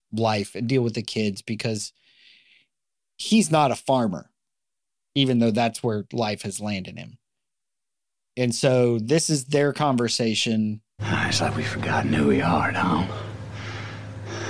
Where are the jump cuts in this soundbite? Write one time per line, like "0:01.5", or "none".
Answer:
0:11.0